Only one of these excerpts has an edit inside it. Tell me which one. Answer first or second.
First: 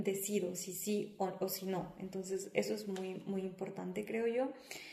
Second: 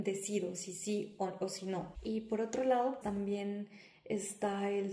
second